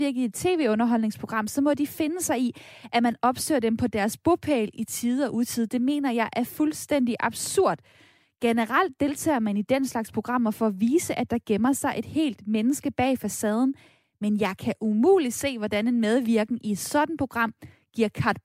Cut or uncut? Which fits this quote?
uncut